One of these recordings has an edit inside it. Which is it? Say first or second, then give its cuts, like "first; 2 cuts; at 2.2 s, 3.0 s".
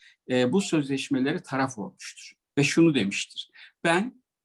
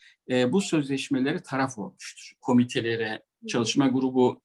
second; 1 cut; at 2.4 s